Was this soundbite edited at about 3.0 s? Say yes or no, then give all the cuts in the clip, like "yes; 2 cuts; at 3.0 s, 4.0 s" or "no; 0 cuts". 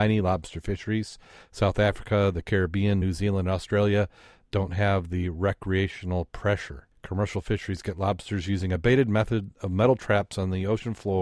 no; 0 cuts